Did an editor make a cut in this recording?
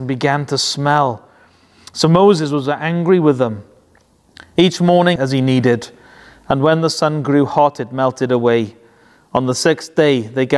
yes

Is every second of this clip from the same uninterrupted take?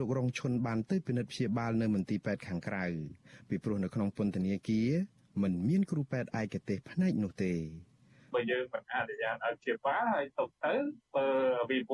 yes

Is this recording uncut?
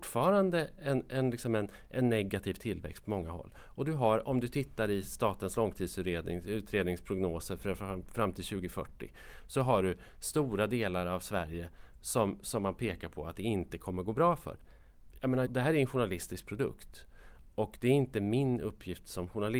no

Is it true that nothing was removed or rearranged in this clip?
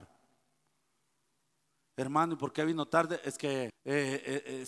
no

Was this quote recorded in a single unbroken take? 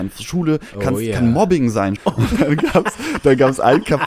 no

